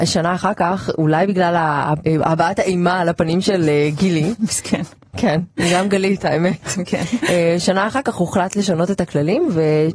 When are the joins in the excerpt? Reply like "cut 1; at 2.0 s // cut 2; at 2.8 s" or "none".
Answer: none

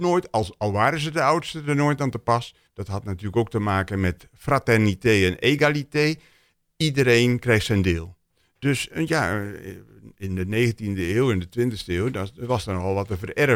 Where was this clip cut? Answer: cut 1; at 2.7 s

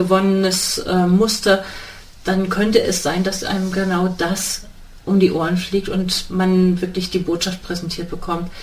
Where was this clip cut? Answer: none

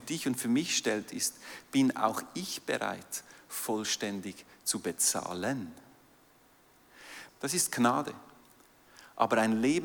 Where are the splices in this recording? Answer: cut 1; at 7.3 s

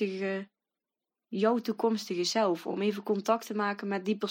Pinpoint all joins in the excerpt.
none

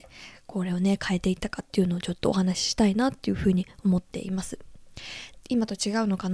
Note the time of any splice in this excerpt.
cut 1; at 5.4 s

